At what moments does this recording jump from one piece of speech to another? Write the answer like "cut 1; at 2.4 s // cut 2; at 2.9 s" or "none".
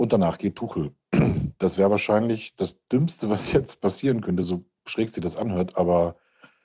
none